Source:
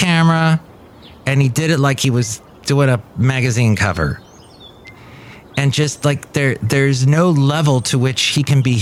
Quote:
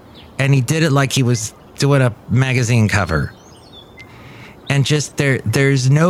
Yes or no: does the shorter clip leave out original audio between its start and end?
yes